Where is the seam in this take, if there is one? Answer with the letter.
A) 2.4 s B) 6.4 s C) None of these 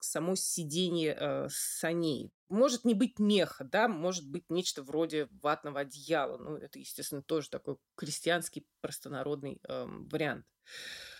A